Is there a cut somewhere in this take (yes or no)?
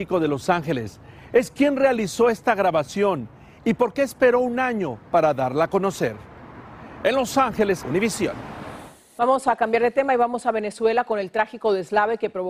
yes